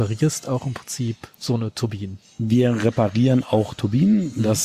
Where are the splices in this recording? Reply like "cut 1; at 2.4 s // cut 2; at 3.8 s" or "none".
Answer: cut 1; at 1.3 s